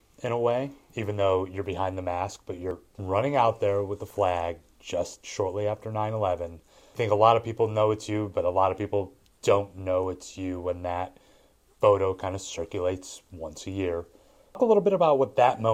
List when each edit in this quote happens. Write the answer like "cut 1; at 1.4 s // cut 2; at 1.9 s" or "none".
none